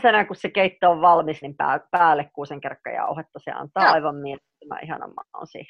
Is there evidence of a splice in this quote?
yes; 1 cut; at 1.4 s

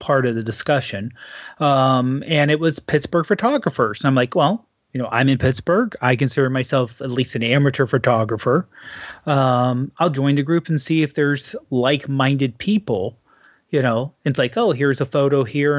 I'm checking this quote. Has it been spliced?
no; 0 cuts

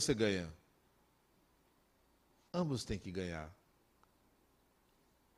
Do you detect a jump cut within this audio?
yes; 1 cut; at 2.5 s

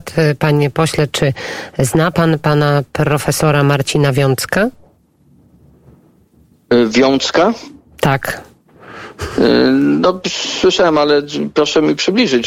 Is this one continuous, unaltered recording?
yes; 0 cuts

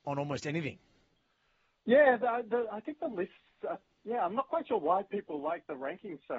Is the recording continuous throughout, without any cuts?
no; 1 cut; at 3.7 s

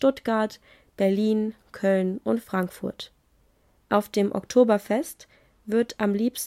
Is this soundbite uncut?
no; 1 cut; at 3.8 s

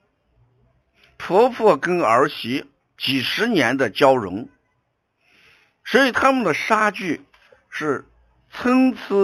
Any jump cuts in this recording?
no; 0 cuts

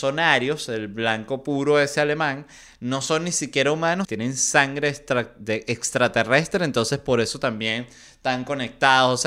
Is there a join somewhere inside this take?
yes; 1 cut; at 4.0 s

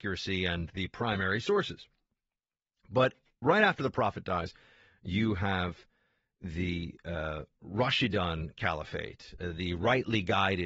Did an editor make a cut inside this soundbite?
no; 0 cuts

